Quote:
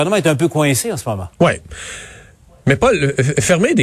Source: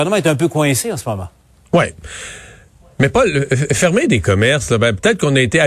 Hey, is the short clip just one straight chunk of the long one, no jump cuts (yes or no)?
no